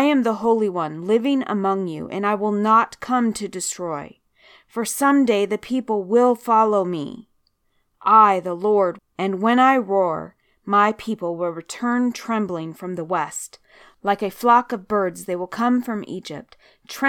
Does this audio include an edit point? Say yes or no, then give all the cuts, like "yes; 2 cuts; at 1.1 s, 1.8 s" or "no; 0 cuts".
yes; 1 cut; at 9.0 s